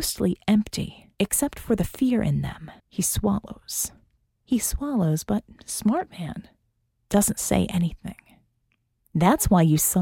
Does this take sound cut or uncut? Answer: cut